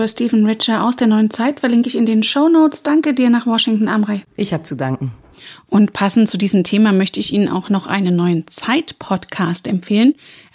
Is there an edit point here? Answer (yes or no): no